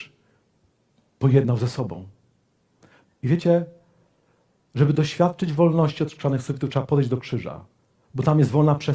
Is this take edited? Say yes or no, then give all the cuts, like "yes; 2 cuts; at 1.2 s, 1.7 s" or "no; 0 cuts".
yes; 1 cut; at 3.0 s